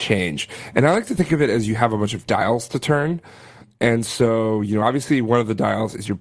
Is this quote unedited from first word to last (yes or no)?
yes